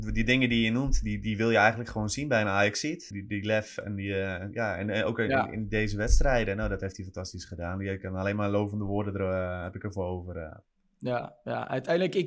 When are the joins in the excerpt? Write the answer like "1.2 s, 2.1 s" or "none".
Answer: 3.1 s